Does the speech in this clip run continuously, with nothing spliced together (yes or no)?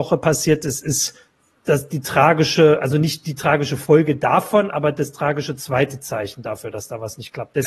yes